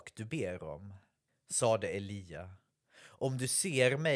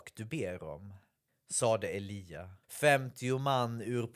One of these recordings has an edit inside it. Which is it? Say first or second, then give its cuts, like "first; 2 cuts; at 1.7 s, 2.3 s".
second; 1 cut; at 2.6 s